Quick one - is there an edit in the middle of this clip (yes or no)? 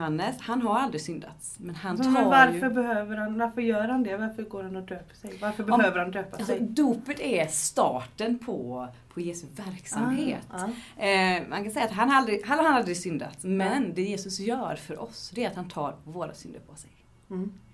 no